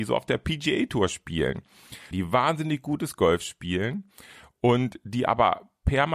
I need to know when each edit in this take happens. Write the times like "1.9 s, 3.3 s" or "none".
2.1 s